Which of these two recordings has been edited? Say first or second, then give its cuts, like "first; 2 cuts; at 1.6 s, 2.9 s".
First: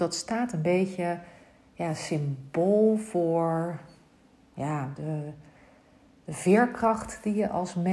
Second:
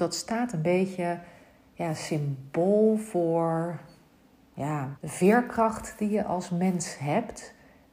second; 1 cut; at 5.0 s